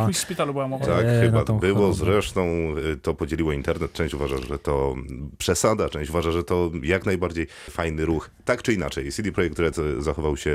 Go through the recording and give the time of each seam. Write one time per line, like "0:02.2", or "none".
none